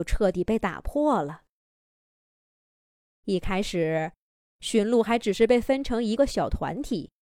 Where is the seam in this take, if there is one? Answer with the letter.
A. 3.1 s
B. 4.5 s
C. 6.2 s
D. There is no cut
C